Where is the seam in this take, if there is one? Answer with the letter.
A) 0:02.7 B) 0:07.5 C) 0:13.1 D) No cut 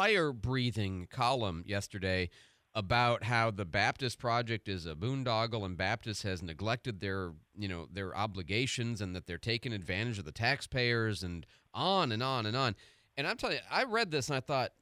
D